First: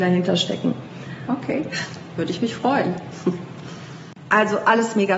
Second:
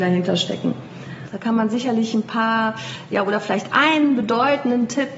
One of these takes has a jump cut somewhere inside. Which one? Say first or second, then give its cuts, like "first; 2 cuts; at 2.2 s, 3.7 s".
second; 1 cut; at 1.3 s